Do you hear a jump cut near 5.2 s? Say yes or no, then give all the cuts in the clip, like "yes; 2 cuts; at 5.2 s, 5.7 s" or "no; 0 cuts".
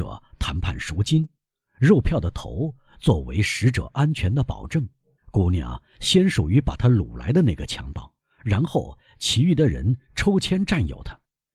yes; 1 cut; at 5.2 s